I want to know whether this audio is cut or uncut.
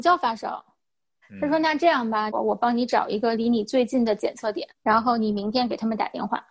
cut